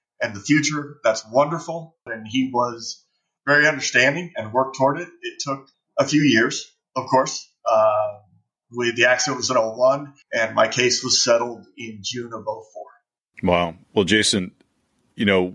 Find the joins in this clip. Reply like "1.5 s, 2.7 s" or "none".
2.1 s, 10.2 s